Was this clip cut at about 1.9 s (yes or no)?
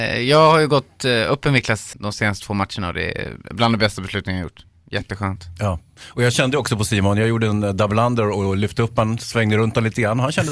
yes